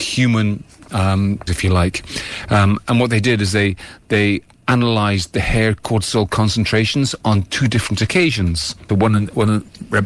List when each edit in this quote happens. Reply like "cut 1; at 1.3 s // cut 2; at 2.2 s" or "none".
cut 1; at 1.5 s // cut 2; at 8.9 s

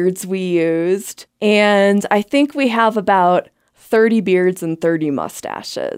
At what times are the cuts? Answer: cut 1; at 1.3 s

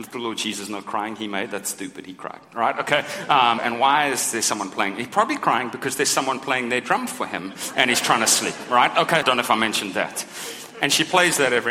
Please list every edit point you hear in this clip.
cut 1; at 3.6 s // cut 2; at 9.2 s

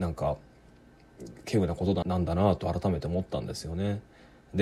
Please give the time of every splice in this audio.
cut 1; at 2.0 s

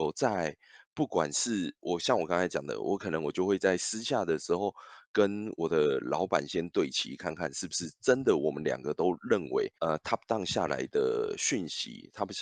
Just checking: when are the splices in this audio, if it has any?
cut 1; at 9.8 s

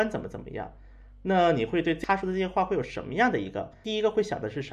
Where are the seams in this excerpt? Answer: none

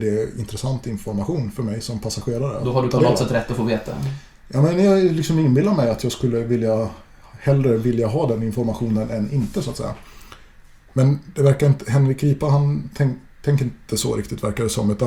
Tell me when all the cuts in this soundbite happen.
none

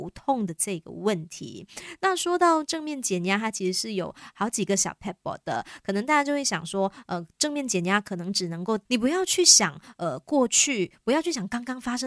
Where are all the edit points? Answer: cut 1; at 8.9 s

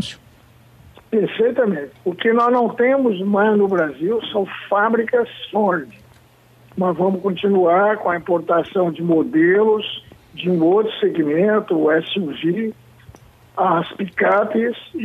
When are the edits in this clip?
cut 1; at 1.9 s

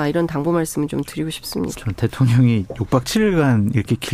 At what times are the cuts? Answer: cut 1; at 1.7 s

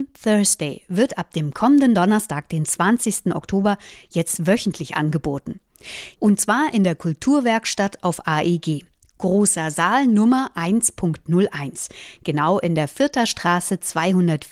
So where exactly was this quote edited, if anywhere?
cut 1; at 6.1 s

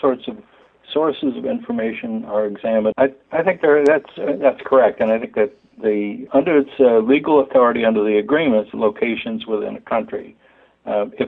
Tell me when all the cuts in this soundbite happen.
cut 1; at 2.9 s // cut 2; at 6.3 s // cut 3; at 8.7 s

